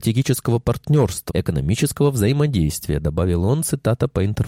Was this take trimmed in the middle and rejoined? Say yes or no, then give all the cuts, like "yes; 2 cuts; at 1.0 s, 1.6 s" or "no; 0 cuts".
yes; 1 cut; at 1.3 s